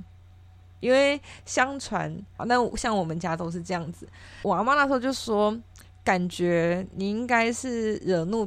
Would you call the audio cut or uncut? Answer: cut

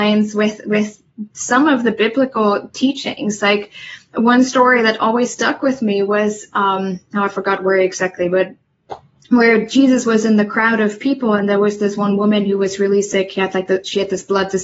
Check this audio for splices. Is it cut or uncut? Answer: uncut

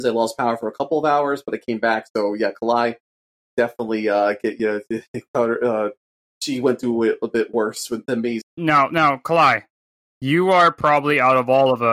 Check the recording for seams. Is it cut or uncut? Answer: cut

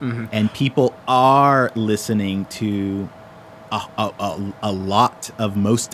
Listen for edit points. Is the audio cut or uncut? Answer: uncut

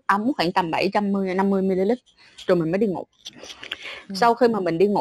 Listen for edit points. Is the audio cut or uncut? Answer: uncut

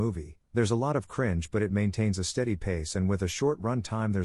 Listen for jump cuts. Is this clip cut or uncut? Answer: uncut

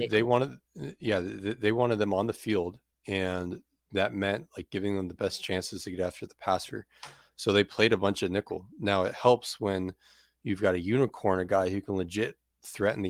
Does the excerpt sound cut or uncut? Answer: uncut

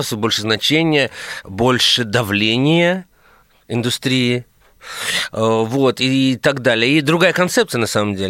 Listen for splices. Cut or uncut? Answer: uncut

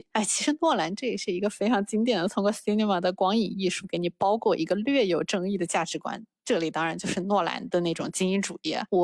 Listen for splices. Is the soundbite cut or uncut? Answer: uncut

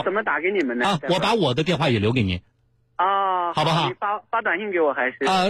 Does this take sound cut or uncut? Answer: uncut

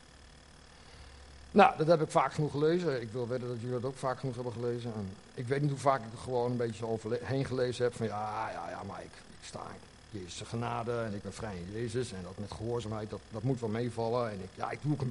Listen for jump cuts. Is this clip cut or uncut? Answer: uncut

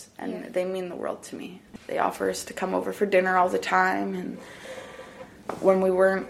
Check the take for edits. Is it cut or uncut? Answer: uncut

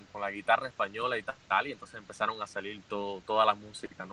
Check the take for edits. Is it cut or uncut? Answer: uncut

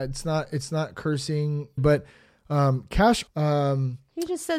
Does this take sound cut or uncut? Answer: cut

